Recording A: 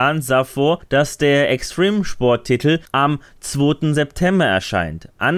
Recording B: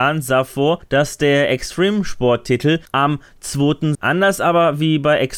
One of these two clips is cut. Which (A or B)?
B